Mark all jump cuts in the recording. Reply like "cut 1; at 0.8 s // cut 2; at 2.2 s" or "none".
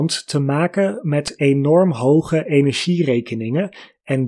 none